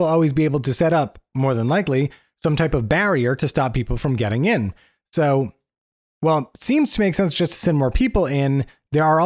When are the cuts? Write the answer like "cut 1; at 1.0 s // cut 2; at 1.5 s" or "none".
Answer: none